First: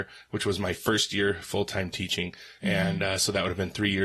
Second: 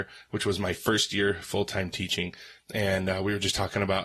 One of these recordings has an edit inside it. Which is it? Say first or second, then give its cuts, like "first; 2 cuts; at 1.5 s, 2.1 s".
second; 1 cut; at 2.6 s